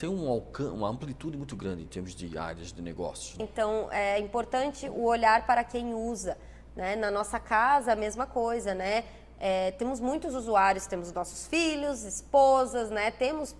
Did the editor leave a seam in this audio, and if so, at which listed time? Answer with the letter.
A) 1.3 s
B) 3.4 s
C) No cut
B